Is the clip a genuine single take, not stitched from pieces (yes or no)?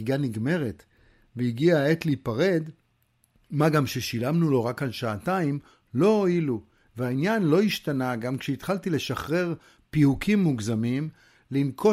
yes